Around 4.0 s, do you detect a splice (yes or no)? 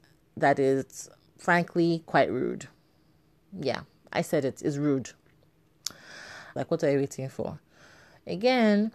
no